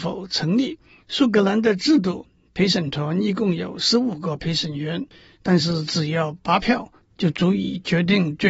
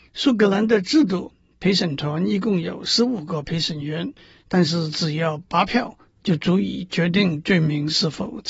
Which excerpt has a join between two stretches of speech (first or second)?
first